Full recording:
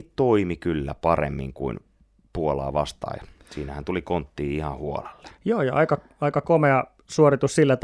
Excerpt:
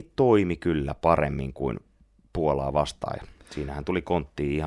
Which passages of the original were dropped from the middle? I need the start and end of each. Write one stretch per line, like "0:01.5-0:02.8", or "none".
none